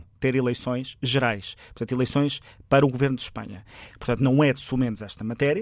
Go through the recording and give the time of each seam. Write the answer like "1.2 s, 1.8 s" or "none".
3.9 s